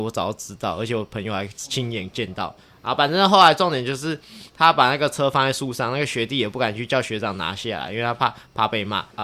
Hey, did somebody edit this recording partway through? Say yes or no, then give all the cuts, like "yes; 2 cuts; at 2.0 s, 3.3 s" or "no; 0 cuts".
no; 0 cuts